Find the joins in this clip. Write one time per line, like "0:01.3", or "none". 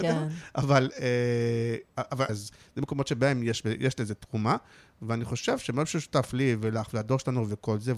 0:02.3